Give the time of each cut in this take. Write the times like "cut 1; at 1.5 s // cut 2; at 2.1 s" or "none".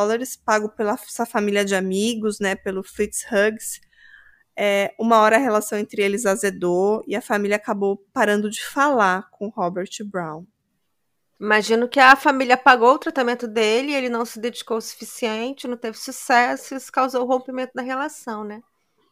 cut 1; at 11.4 s